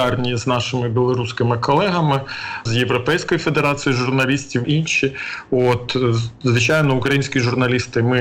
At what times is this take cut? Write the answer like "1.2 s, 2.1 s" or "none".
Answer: 2.7 s, 4.6 s